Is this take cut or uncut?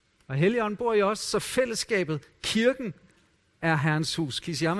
uncut